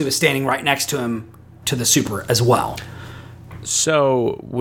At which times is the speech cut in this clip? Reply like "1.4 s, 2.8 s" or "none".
1.6 s